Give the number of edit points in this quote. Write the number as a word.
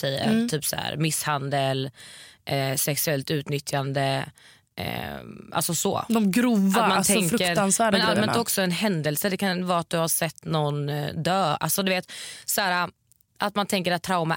zero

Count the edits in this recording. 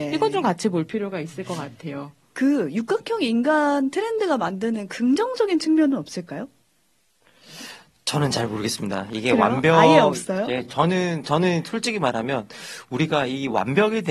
zero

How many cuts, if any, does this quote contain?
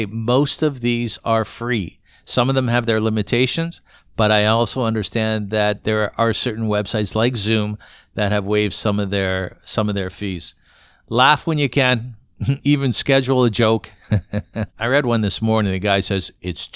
one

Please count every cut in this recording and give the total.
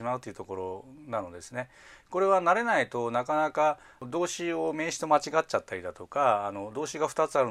zero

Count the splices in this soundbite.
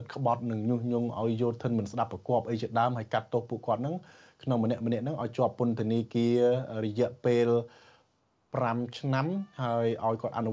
zero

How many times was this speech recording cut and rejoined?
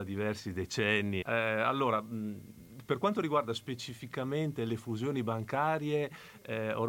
one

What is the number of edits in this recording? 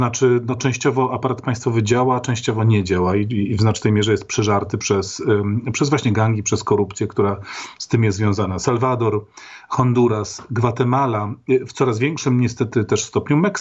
zero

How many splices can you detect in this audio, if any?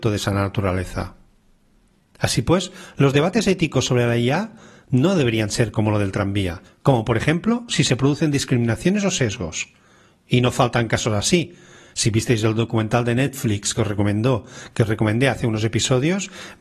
one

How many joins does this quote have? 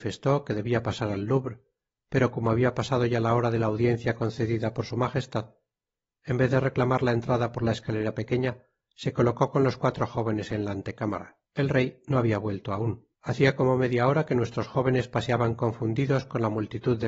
two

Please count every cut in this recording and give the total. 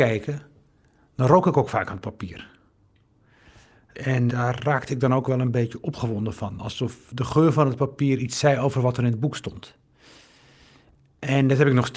one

